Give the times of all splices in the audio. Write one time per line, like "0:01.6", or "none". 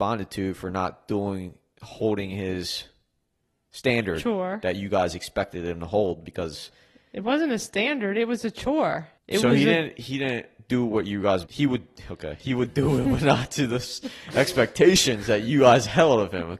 0:09.2
0:11.4